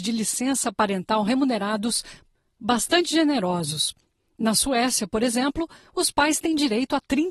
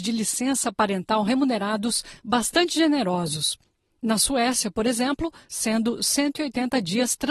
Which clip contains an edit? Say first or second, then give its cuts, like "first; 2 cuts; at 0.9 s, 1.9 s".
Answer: second; 2 cuts; at 2.2 s, 5.4 s